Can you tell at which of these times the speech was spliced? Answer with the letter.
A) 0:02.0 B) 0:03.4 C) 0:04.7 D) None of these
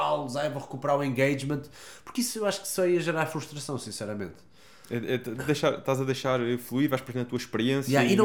D